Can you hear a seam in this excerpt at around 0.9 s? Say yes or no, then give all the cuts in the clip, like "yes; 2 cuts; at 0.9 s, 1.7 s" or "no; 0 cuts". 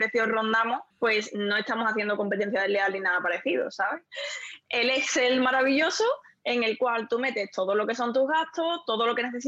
no; 1 cut; at 4.1 s